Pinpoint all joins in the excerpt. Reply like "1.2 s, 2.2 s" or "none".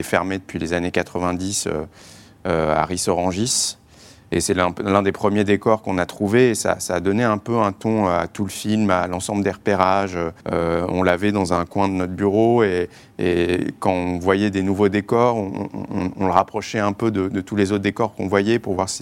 10.4 s